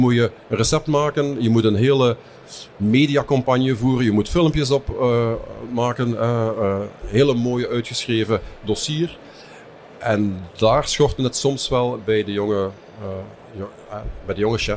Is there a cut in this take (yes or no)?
no